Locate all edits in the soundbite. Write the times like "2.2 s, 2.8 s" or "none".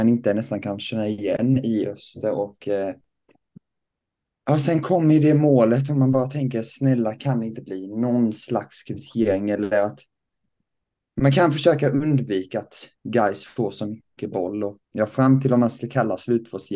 14.8 s